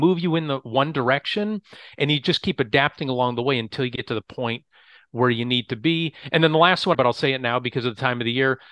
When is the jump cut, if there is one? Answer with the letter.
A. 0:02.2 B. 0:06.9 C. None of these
B